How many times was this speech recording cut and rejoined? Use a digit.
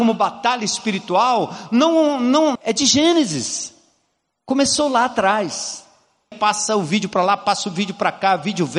2